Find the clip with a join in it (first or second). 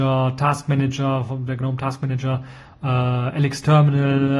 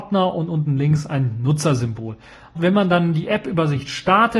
second